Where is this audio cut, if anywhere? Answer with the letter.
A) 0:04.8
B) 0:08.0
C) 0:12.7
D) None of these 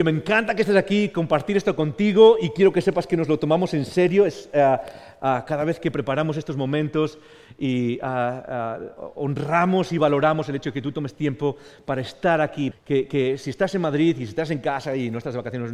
C